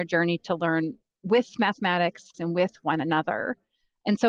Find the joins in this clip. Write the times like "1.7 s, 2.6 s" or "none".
2.3 s

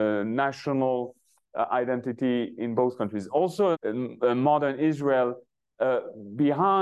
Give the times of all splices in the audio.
3.7 s

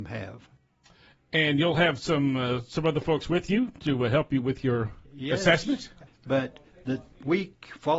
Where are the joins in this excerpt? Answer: 6.1 s

